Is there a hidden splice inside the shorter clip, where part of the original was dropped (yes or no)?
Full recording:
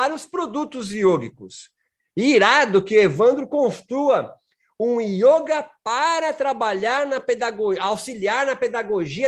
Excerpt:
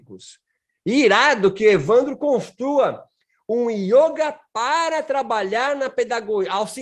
no